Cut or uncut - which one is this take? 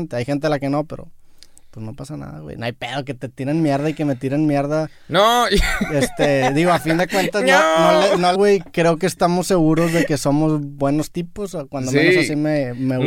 cut